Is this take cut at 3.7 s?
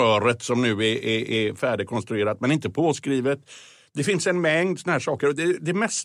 no; 0 cuts

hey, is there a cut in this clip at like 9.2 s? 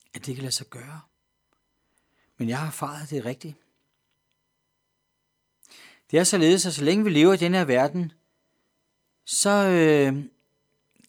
no; 0 cuts

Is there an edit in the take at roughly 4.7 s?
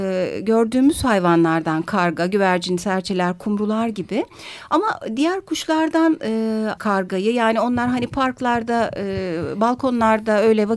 no; 1 cut; at 6.8 s

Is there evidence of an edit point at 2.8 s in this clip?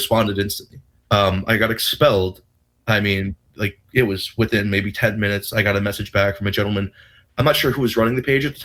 yes; 2 cuts; at 1.0 s, 2.8 s

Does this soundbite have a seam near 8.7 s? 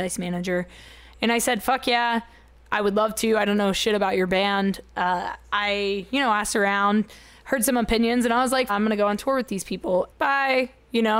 yes; 2 cuts; at 8.7 s, 10.1 s

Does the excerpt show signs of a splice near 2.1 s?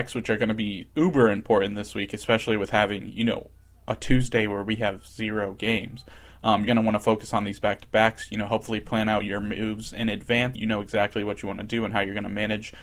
no; 2 cuts; at 6.7 s, 10.5 s

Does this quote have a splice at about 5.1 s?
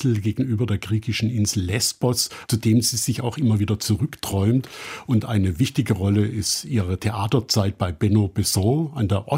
no; 1 cut; at 2.5 s

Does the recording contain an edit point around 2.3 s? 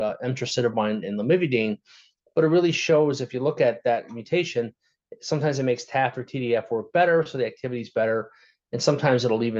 no; 0 cuts

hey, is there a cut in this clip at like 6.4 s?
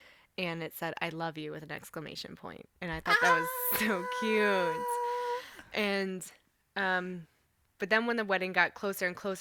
no; 1 cut; at 2.8 s

